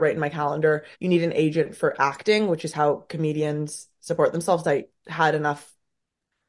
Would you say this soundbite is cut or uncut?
cut